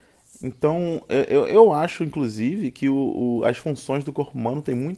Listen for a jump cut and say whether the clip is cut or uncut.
uncut